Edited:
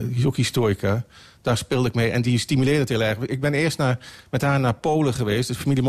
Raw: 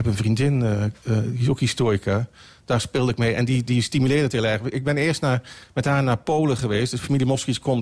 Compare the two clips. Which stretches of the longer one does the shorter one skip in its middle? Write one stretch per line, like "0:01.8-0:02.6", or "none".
0:03.5-0:03.7